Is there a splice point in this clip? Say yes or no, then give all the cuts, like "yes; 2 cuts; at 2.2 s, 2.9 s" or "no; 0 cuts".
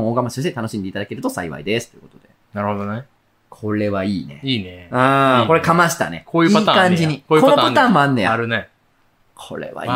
no; 0 cuts